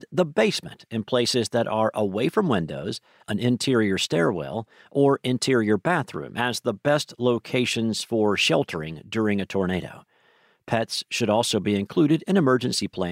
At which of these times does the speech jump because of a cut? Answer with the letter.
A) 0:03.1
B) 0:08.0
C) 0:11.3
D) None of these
D